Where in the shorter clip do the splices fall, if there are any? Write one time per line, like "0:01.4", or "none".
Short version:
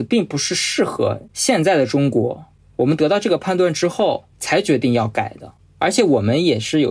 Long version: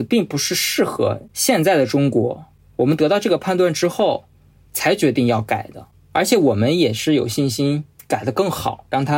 0:04.3

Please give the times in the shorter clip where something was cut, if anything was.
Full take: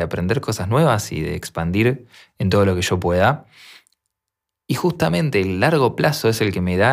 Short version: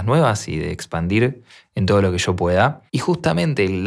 0:02.9

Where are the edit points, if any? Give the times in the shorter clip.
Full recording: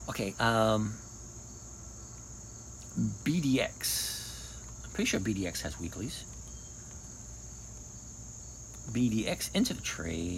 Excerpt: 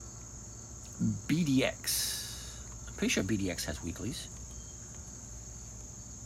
none

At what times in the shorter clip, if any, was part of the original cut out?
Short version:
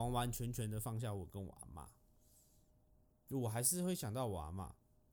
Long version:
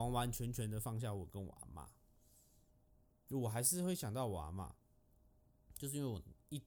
none

